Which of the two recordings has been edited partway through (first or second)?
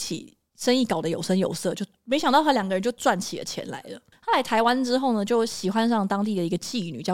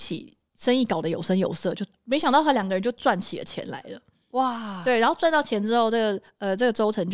first